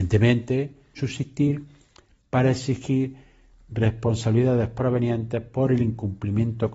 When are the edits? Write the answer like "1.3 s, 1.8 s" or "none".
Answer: 1.0 s